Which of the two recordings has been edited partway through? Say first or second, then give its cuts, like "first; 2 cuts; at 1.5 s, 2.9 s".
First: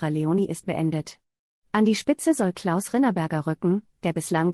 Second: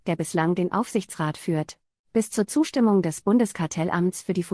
second; 1 cut; at 2.0 s